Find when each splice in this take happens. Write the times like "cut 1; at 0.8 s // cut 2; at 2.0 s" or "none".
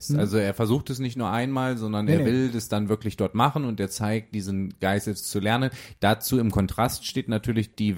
none